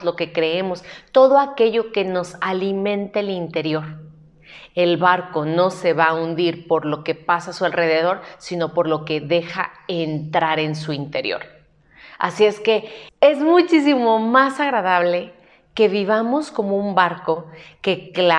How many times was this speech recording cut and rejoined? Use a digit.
1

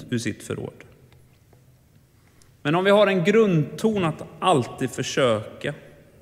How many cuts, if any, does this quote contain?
1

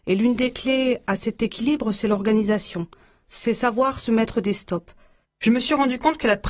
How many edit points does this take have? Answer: 1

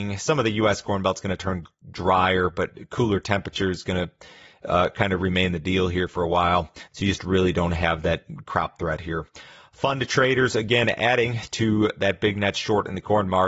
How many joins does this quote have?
1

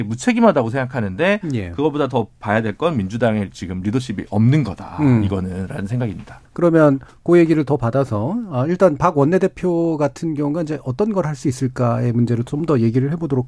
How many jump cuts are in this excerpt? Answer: 1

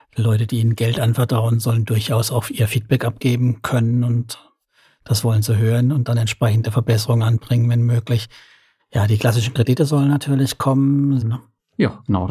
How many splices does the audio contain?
1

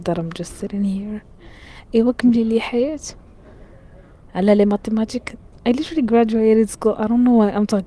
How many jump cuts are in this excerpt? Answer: 0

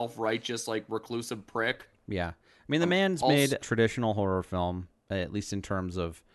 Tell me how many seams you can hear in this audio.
2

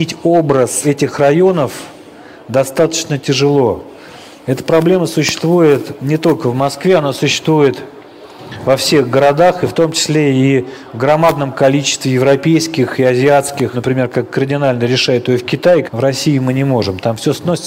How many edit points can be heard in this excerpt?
2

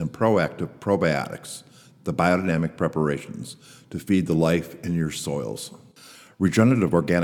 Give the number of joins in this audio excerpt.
0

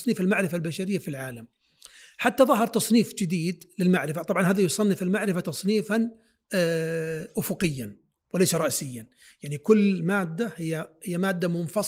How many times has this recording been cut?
0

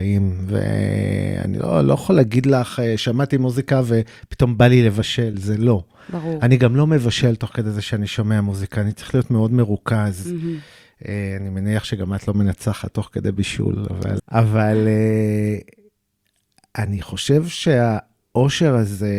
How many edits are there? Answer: 1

